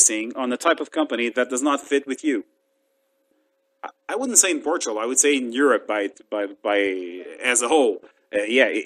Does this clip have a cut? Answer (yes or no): yes